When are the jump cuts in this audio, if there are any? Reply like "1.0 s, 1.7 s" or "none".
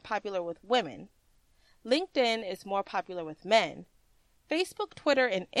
none